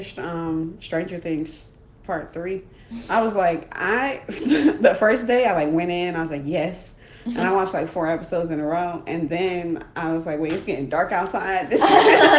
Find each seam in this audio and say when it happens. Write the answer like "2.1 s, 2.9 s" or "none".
none